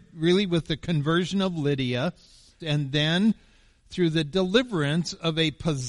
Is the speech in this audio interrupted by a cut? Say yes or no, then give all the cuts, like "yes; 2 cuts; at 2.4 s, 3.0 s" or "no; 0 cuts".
yes; 1 cut; at 2.6 s